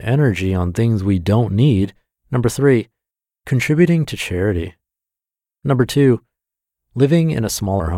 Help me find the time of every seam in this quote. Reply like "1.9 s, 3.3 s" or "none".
2.2 s, 5.5 s